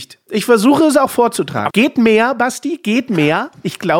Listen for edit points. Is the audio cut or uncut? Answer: cut